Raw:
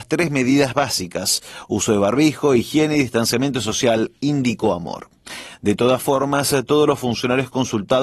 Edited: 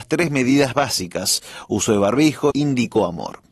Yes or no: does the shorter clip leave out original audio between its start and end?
yes